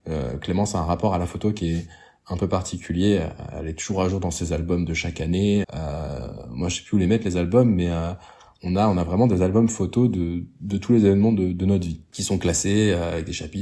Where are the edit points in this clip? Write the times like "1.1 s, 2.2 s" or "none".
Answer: 5.6 s